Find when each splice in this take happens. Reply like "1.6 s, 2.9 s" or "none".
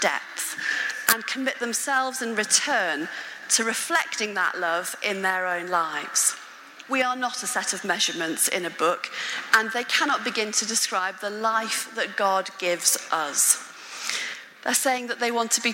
6.9 s, 14.5 s